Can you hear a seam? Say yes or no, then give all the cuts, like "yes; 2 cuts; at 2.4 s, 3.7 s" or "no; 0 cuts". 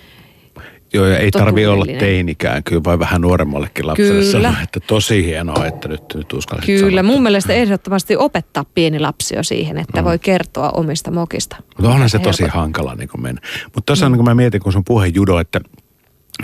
no; 0 cuts